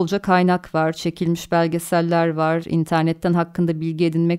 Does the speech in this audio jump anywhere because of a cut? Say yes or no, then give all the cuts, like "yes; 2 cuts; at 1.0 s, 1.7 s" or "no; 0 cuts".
yes; 1 cut; at 2.6 s